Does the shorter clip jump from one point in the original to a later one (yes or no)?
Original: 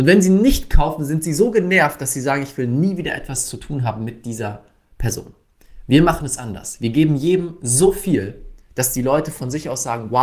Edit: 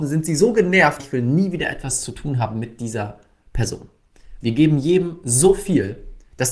yes